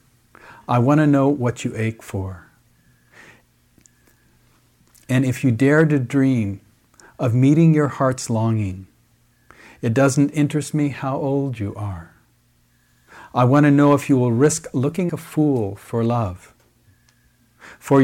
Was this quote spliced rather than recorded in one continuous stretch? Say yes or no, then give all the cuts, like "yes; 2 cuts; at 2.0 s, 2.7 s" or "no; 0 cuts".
yes; 1 cut; at 15.1 s